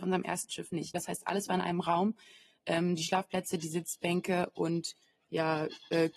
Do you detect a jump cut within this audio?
yes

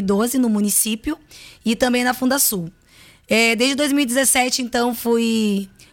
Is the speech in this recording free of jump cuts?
yes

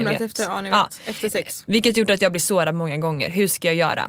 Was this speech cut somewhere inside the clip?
yes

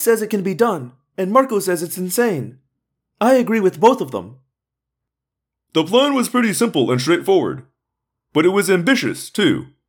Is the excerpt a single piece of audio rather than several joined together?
yes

